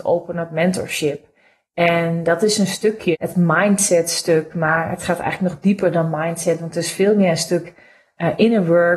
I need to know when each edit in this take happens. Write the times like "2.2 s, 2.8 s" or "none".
3.1 s